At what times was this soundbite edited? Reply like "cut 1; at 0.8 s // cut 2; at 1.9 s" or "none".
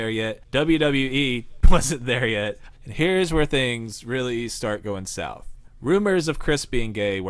cut 1; at 1.6 s // cut 2; at 2.7 s